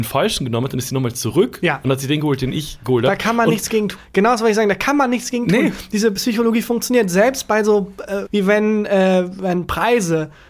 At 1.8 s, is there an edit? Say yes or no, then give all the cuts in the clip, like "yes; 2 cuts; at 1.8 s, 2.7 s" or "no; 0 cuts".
no; 2 cuts; at 4.0 s, 8.3 s